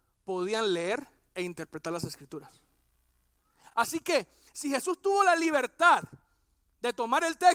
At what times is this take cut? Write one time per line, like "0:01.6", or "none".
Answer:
none